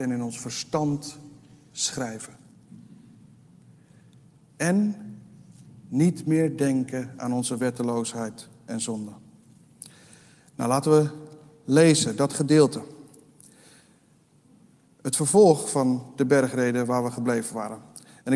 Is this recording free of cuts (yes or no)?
yes